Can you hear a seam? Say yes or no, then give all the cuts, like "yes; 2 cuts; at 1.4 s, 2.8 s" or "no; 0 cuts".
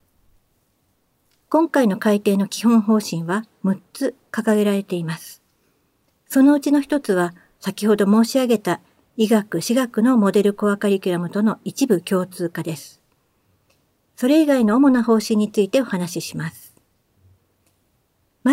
no; 0 cuts